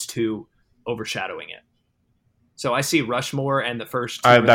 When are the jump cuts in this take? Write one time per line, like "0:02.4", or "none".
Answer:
none